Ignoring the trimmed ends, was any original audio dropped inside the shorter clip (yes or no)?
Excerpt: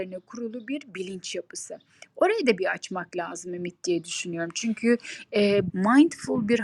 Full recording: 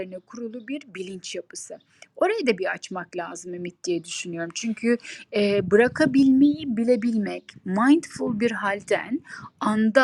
yes